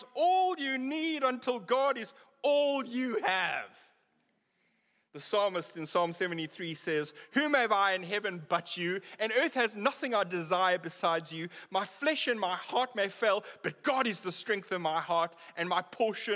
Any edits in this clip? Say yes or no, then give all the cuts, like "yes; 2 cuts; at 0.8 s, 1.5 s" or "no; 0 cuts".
no; 0 cuts